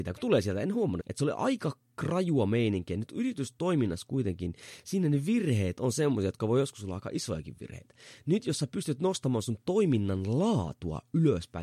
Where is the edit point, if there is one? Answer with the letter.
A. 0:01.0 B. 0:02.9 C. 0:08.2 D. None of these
A